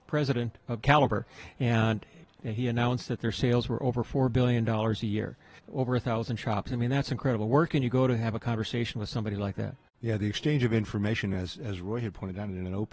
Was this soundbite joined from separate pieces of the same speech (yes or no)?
no